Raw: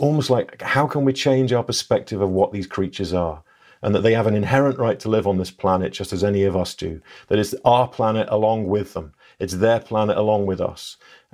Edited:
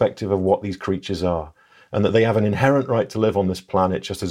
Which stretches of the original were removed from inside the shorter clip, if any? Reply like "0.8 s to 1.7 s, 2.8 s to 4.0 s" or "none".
none